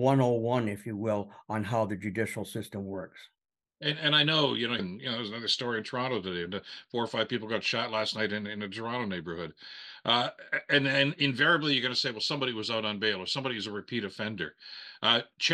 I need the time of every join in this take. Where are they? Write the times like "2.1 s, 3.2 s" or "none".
4.8 s